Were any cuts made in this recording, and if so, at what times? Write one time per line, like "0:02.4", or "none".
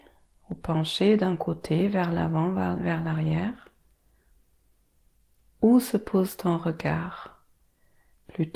none